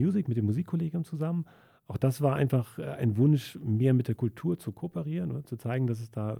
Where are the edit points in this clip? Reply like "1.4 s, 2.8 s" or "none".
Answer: none